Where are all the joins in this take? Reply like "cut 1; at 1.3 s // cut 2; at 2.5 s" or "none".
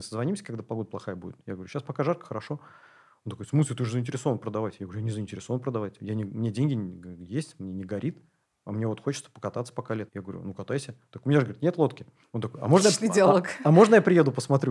cut 1; at 10.1 s // cut 2; at 12.2 s